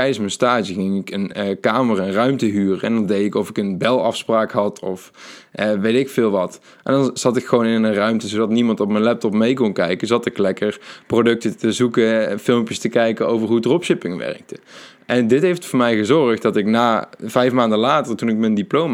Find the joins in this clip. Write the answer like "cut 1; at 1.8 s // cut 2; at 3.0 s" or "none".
none